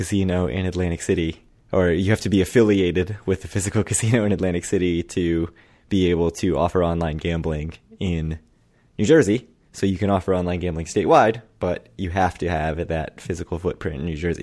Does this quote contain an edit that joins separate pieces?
no; 0 cuts

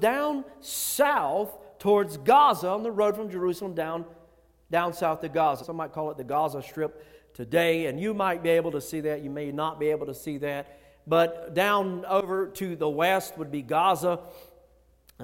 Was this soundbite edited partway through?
yes; 1 cut; at 5.6 s

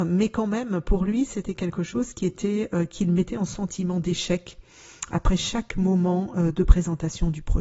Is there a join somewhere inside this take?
no; 0 cuts

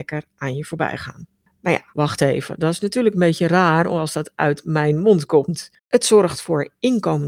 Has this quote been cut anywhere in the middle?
yes; 2 cuts; at 1.9 s, 5.8 s

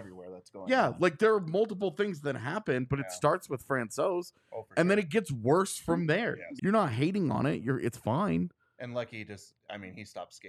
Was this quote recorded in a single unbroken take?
no; 1 cut; at 6.6 s

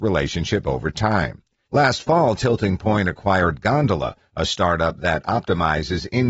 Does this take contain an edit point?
yes; 1 cut; at 1.7 s

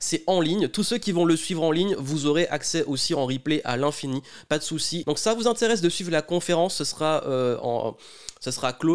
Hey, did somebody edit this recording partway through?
yes; 1 cut; at 5.0 s

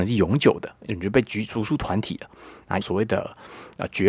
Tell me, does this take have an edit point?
yes; 1 cut; at 2.8 s

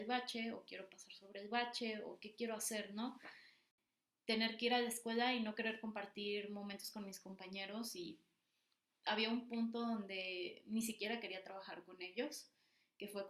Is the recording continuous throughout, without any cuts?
yes; 0 cuts

